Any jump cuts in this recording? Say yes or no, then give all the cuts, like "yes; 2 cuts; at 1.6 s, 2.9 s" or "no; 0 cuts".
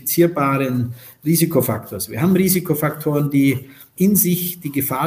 no; 0 cuts